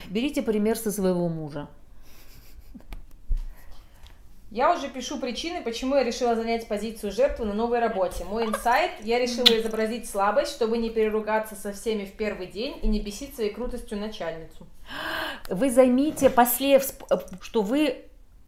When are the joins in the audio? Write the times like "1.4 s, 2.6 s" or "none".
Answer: 15.4 s, 17.4 s

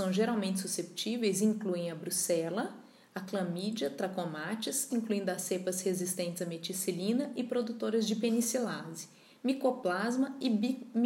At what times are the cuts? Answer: 4.9 s

